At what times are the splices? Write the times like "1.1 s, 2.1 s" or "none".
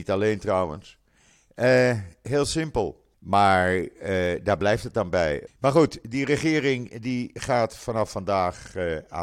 3.1 s, 5.5 s